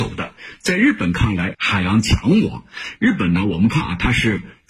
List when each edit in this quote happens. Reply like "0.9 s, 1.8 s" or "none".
1.5 s